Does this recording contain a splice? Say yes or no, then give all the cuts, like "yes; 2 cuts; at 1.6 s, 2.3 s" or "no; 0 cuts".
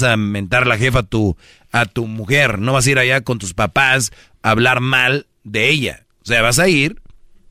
no; 0 cuts